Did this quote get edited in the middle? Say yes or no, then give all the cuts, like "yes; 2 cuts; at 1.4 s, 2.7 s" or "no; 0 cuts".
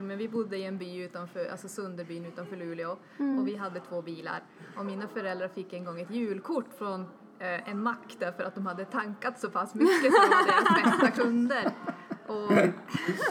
no; 0 cuts